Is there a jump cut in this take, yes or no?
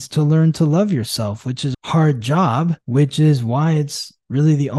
yes